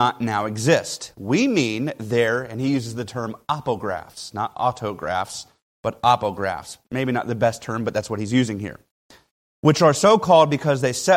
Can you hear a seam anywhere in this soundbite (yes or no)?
no